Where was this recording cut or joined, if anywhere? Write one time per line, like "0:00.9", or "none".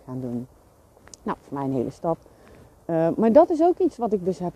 none